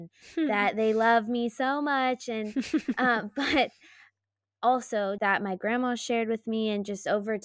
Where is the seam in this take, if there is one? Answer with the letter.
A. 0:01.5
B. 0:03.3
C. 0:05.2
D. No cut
C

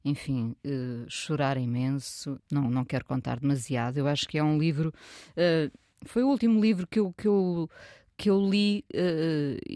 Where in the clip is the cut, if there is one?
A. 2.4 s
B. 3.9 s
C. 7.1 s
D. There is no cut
A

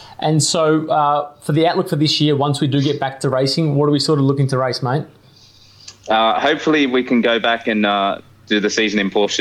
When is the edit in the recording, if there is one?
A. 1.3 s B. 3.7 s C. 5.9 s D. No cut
D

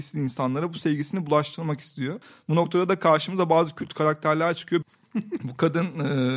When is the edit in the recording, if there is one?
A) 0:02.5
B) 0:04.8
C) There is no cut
B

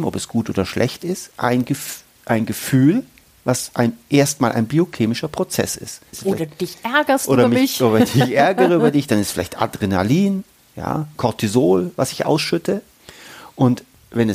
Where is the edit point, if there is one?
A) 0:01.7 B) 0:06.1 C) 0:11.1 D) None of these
B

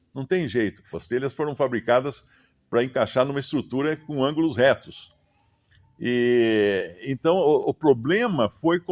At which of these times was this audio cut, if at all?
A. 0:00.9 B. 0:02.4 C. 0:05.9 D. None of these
A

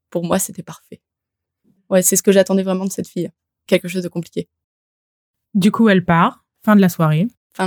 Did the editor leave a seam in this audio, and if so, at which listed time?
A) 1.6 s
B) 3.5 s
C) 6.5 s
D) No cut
C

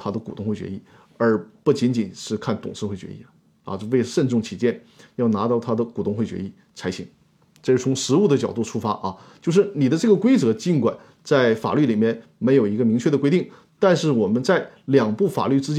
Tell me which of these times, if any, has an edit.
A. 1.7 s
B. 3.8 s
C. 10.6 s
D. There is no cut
D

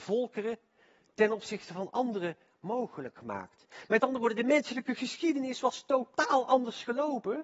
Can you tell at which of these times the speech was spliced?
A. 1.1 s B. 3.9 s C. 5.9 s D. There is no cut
D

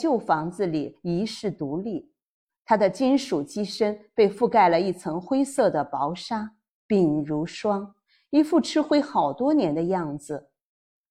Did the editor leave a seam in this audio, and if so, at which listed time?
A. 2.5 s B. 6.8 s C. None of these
B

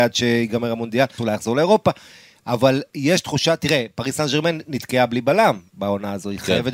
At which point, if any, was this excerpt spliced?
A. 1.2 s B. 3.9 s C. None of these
A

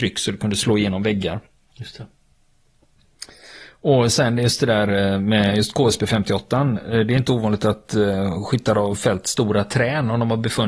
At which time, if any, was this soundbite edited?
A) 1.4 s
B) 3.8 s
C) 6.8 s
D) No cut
D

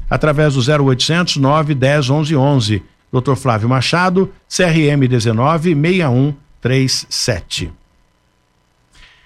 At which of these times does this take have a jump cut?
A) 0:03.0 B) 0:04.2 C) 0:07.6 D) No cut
A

